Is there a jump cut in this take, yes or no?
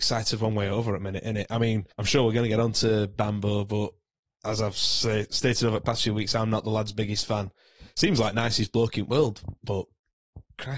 yes